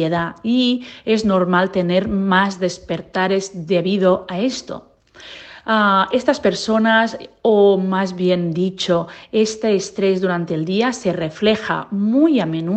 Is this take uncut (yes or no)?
yes